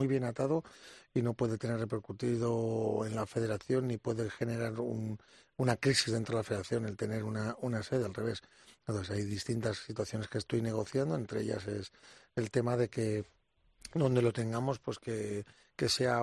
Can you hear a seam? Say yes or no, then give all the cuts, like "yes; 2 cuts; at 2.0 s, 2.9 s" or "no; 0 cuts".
no; 0 cuts